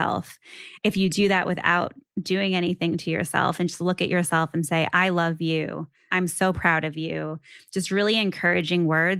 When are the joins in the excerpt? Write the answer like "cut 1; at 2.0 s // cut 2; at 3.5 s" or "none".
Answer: cut 1; at 6.1 s